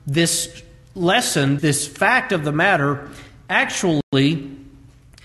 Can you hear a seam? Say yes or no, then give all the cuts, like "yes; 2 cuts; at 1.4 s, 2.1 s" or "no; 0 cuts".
yes; 1 cut; at 1.6 s